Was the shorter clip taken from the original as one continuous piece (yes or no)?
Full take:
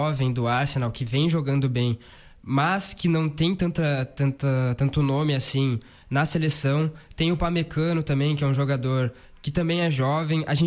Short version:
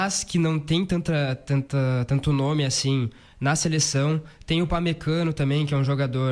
yes